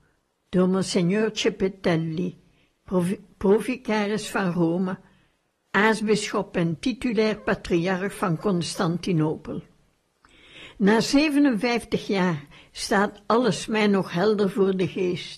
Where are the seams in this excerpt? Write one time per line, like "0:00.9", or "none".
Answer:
none

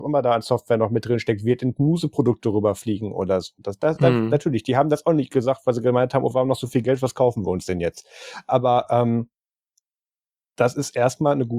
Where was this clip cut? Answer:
none

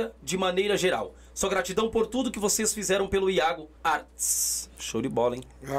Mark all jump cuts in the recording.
0:03.8

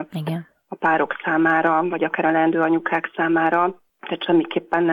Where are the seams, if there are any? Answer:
0:03.9

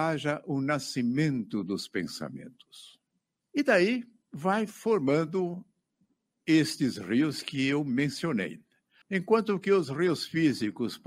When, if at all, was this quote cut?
0:09.0

